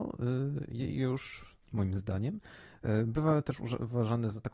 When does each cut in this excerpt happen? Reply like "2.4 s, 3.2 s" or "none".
1.6 s